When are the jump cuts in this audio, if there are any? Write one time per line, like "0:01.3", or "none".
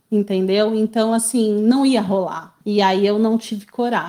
0:02.6